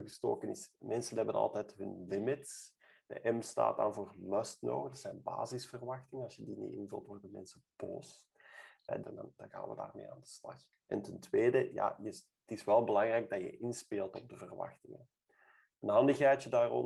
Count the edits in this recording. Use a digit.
2